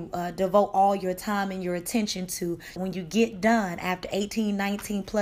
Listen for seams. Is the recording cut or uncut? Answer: cut